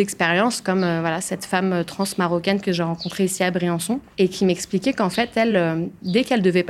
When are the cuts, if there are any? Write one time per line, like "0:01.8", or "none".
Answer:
none